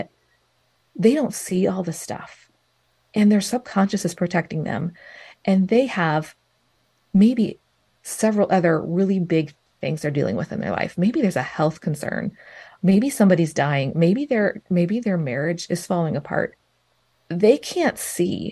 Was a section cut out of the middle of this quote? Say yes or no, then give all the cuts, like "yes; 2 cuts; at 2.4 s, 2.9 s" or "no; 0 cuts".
no; 0 cuts